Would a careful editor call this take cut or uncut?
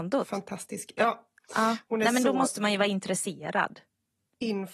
uncut